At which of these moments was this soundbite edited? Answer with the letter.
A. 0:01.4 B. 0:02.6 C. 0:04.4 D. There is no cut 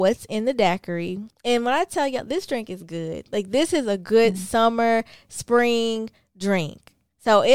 D